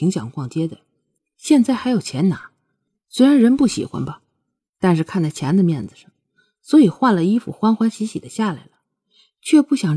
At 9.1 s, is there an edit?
no; 0 cuts

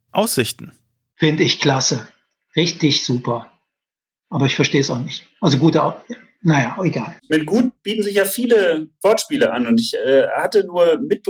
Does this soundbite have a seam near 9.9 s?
no; 1 cut; at 7.2 s

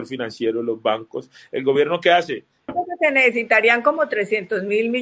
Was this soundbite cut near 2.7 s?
yes; 1 cut; at 2.7 s

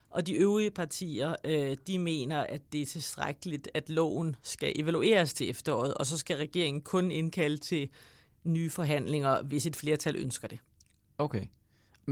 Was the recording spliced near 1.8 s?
no; 0 cuts

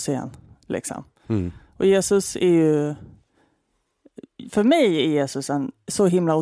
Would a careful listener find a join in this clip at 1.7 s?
no; 0 cuts

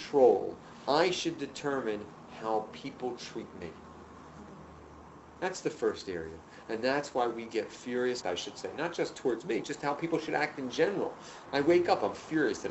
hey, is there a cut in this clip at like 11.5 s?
yes; 2 cuts; at 8.2 s, 11.5 s

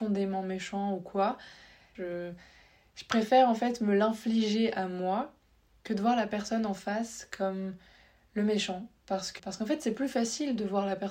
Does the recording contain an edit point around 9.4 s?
yes; 2 cuts; at 1.9 s, 9.4 s

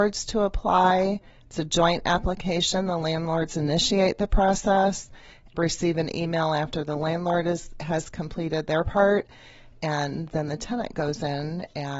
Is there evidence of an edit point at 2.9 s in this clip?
no; 1 cut; at 5.5 s

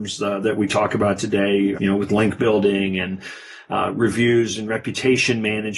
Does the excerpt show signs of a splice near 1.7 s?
yes; 1 cut; at 1.7 s

